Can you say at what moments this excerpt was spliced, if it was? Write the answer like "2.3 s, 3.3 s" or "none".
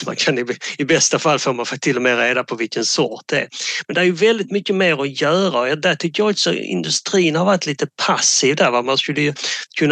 none